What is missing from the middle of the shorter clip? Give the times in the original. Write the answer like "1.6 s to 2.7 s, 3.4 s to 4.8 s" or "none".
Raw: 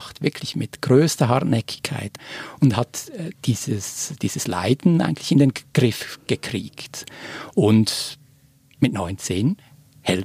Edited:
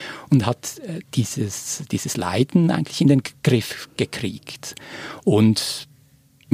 none